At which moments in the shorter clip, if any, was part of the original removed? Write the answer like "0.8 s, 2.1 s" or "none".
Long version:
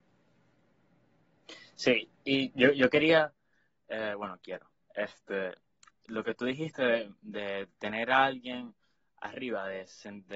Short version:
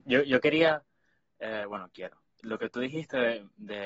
2.3 s